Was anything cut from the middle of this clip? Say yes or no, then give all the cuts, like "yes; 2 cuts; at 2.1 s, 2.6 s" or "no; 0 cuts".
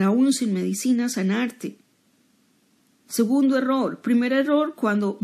no; 0 cuts